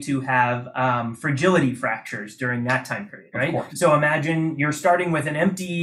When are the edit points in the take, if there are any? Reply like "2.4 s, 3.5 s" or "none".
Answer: 3.7 s